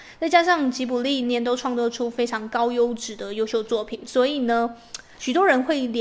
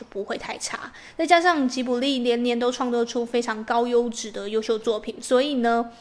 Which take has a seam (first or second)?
first